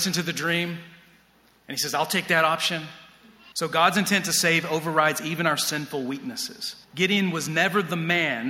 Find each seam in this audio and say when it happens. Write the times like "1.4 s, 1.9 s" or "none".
3.5 s, 6.8 s